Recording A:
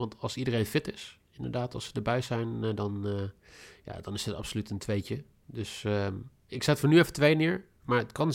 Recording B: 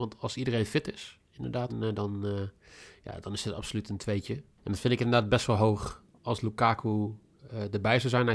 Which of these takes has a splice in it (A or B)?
B